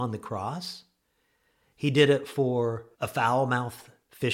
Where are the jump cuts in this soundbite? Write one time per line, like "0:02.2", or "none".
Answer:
0:02.9